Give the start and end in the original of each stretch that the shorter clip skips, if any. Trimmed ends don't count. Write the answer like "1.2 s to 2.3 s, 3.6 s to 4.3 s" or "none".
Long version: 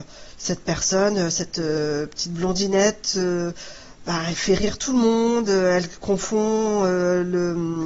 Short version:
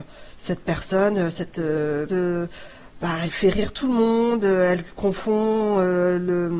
2.1 s to 3.1 s